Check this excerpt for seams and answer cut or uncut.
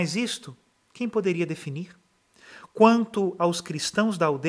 uncut